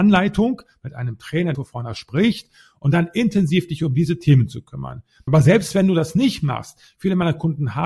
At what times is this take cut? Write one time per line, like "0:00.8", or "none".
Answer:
0:01.5
0:05.3